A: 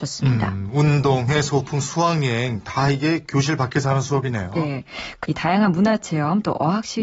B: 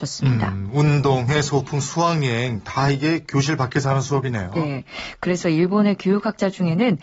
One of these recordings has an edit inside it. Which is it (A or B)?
A